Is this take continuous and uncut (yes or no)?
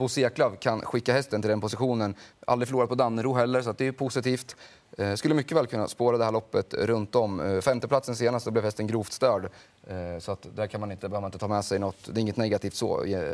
no